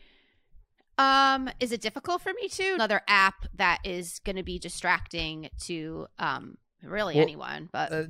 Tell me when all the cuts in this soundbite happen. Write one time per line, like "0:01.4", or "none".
0:02.8